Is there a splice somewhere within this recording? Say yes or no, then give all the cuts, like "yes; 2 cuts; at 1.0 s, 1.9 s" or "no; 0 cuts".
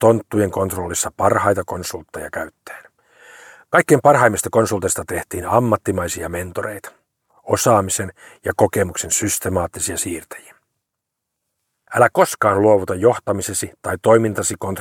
yes; 1 cut; at 11.9 s